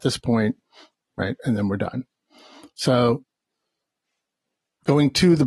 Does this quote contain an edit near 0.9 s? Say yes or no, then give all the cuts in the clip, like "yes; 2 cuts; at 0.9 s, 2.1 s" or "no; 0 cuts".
yes; 1 cut; at 0.9 s